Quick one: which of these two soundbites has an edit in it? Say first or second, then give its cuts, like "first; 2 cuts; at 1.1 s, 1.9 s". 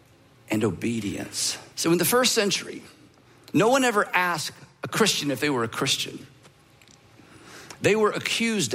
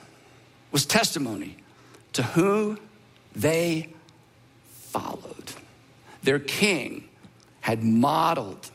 first; 1 cut; at 1.7 s